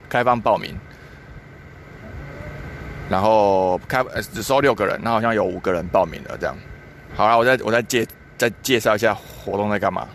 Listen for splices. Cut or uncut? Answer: cut